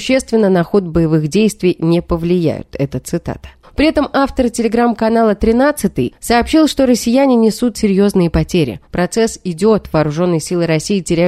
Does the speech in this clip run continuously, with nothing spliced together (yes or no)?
no